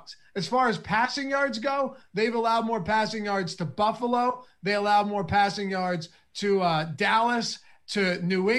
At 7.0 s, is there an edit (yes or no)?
no